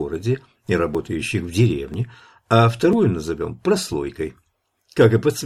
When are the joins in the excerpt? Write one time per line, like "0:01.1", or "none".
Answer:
none